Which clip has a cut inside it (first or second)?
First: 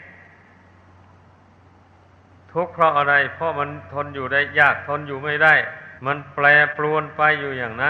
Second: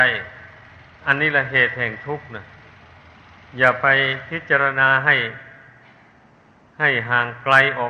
first